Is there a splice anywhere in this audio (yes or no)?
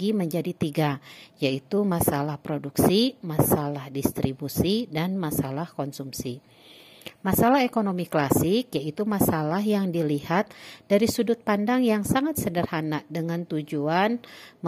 no